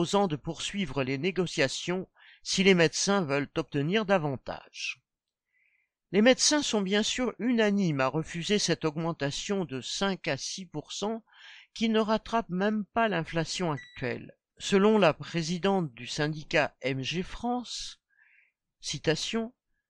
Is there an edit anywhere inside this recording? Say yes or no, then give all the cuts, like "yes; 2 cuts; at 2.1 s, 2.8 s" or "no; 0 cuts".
no; 0 cuts